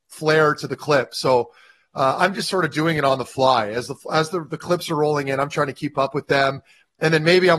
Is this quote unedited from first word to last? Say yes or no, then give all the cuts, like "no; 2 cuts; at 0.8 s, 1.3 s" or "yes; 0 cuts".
yes; 0 cuts